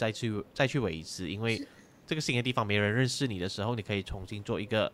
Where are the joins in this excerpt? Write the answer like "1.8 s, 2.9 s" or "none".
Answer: none